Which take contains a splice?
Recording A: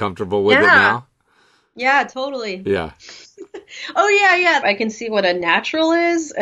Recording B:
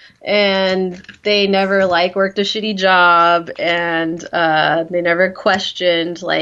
A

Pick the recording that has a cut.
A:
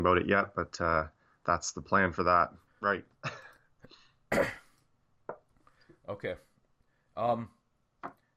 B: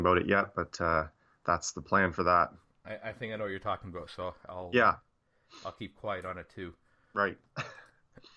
A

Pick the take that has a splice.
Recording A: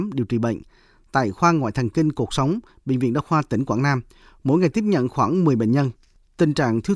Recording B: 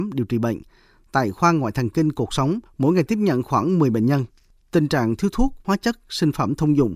B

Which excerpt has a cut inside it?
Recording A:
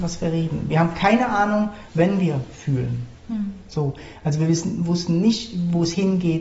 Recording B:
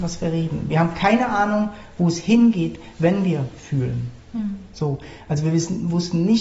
A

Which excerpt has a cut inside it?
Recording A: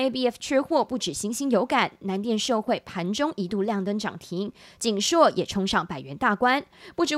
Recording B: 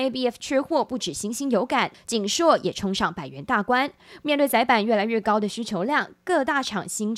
B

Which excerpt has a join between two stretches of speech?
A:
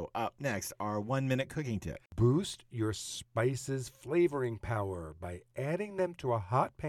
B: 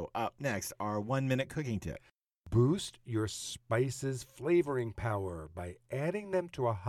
A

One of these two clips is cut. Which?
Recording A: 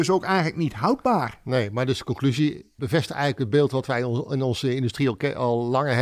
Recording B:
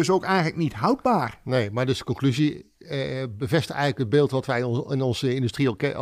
A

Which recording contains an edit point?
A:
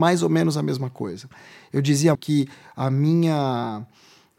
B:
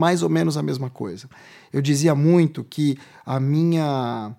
A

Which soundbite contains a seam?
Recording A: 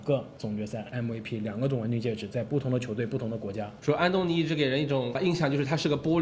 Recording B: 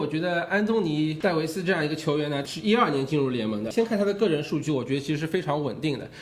A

